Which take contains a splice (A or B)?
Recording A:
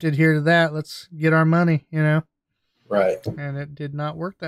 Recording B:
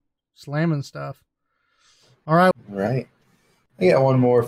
B